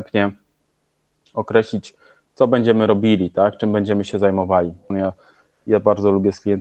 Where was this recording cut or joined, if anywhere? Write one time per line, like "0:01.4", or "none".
0:04.9